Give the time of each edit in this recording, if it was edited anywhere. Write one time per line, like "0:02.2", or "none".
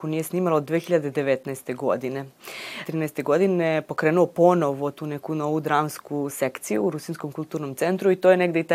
0:02.8